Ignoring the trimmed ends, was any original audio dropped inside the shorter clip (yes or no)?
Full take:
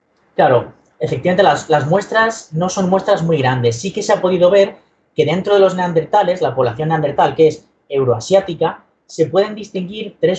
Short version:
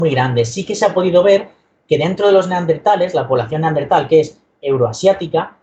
no